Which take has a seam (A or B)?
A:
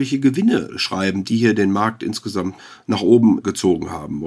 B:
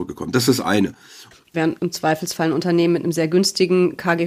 B